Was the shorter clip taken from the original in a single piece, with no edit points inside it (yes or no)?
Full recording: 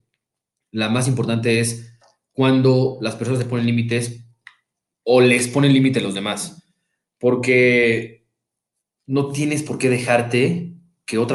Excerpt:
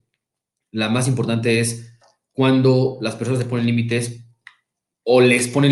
yes